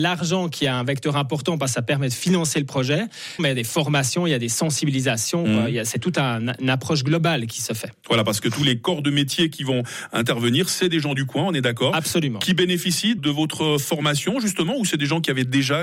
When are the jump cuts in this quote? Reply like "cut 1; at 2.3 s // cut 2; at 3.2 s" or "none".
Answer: cut 1; at 3.4 s // cut 2; at 13.2 s

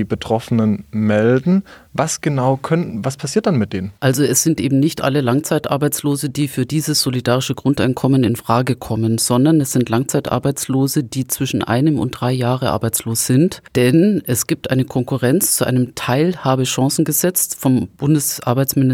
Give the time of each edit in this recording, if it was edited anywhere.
cut 1; at 4.0 s

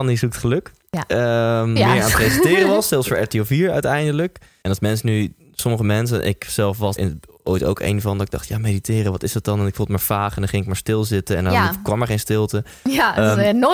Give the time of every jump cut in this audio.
cut 1; at 1.8 s // cut 2; at 4.6 s // cut 3; at 7.0 s

